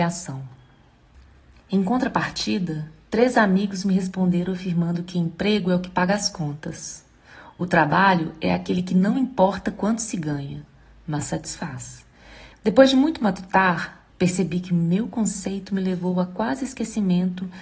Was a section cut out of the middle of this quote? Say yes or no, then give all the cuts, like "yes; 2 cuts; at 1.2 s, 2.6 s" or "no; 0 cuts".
yes; 2 cuts; at 12.5 s, 14.1 s